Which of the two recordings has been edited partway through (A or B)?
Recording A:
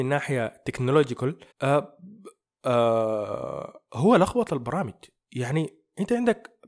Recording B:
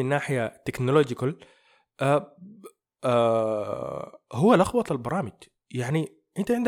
A